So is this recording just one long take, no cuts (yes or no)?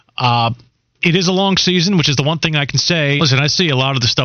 no